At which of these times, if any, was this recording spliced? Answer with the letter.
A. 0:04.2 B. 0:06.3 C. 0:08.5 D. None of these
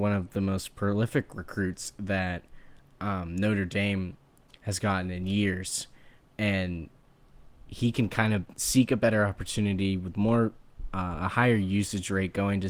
C